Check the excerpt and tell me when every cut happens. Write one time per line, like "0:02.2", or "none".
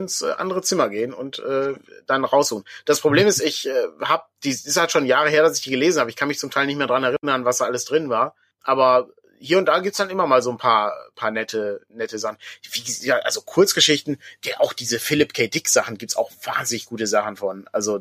none

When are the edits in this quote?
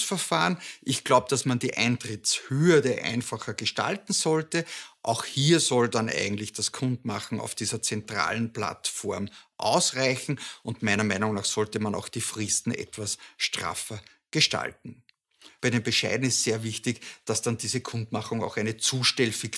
0:15.6

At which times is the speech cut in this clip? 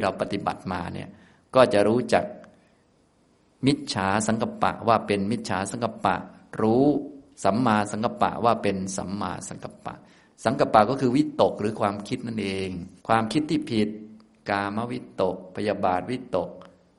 0:13.0

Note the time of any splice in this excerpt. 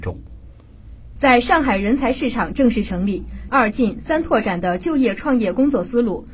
0:01.2
0:03.5

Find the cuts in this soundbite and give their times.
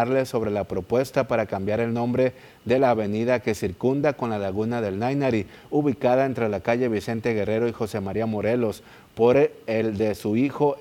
none

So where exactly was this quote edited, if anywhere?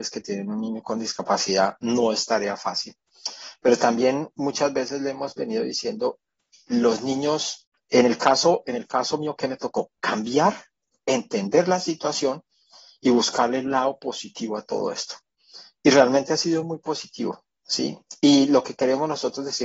none

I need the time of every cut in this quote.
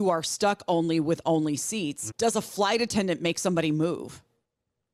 0:02.1

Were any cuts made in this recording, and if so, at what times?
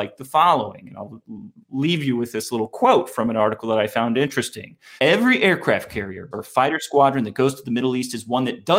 0:05.0
0:06.3

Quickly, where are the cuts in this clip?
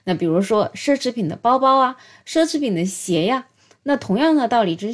none

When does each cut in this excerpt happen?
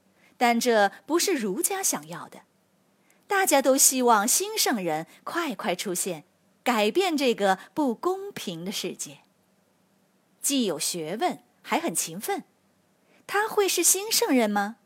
0:10.4
0:11.5

